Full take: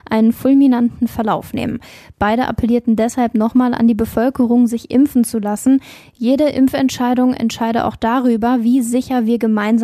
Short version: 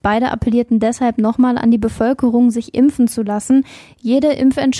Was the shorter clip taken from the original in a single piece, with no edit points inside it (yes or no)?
yes